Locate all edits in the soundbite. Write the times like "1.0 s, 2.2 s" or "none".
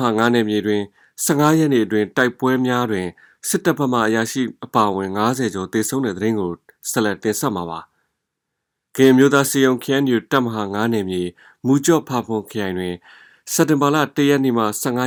none